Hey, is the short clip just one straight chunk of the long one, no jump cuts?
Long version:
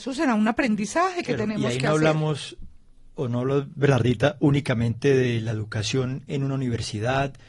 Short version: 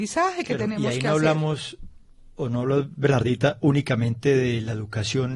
yes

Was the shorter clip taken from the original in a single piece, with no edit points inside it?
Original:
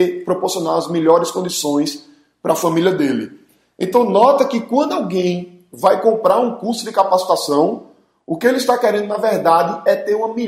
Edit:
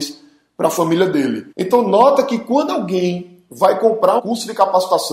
no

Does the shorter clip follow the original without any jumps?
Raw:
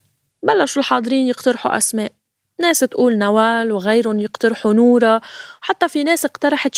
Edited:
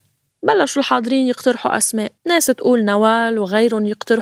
no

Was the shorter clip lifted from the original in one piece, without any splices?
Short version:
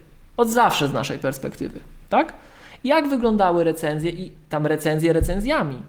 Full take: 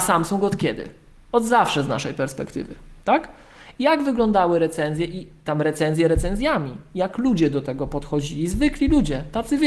yes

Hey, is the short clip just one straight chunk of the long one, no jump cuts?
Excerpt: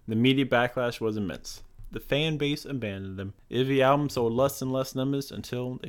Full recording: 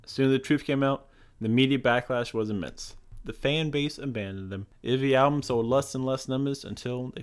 yes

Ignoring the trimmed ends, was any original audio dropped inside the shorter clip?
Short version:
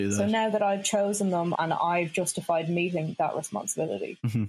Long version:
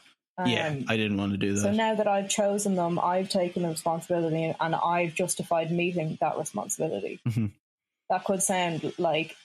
yes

